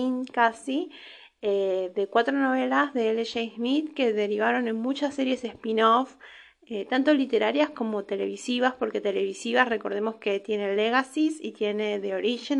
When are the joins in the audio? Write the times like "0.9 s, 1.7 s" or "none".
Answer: none